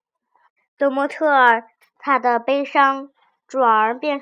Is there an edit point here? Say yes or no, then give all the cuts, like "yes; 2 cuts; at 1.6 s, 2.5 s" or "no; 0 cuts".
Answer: yes; 1 cut; at 1.8 s